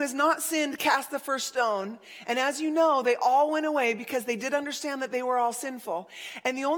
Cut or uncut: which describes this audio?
uncut